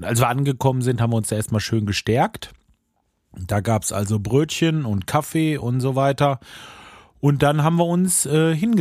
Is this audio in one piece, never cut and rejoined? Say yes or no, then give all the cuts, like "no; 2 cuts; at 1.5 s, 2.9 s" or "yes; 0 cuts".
yes; 0 cuts